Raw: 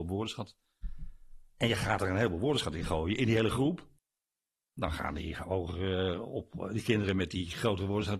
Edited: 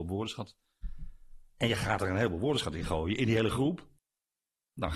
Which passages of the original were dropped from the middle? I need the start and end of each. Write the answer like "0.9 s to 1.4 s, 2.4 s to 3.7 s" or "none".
none